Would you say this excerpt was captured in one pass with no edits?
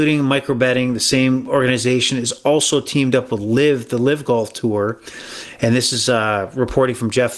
yes; 0 cuts

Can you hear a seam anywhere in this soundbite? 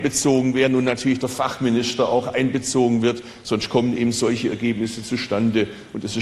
no; 0 cuts

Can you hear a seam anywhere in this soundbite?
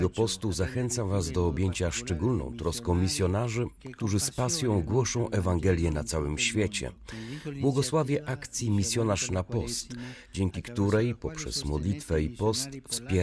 no; 0 cuts

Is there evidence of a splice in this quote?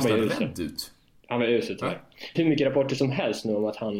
yes; 1 cut; at 2.3 s

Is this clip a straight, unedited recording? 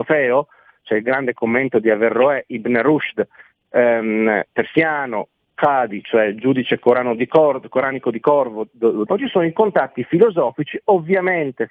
no; 1 cut; at 9.1 s

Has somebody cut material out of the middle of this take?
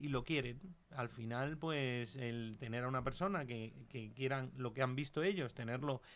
no; 0 cuts

